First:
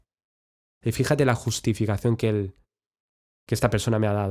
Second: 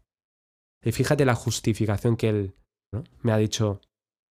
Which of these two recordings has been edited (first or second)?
second